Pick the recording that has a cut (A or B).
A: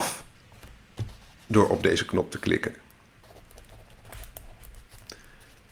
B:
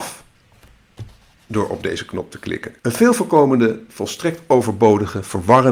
B